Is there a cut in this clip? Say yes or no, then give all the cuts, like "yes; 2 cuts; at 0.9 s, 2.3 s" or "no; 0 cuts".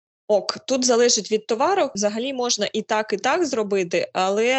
no; 0 cuts